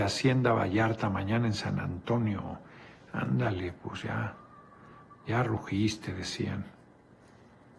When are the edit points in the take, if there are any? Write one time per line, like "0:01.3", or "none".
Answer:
none